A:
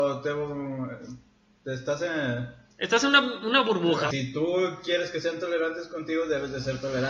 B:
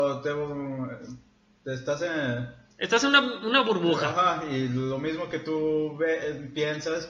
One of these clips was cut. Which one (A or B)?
A